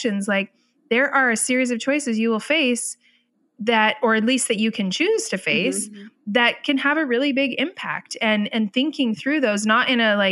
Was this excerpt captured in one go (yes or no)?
yes